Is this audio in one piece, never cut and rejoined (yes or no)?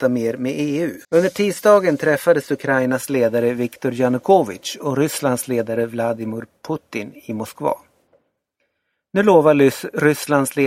no